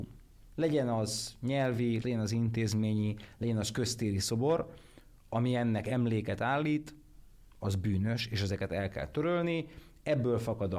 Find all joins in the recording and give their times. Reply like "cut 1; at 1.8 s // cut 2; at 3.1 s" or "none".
cut 1; at 2.0 s